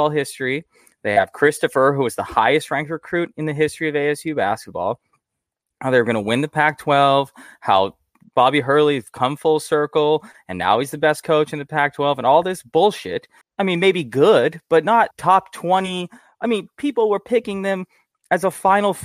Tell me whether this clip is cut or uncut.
cut